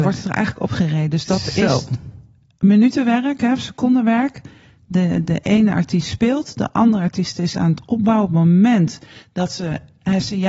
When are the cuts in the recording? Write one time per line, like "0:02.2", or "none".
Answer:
none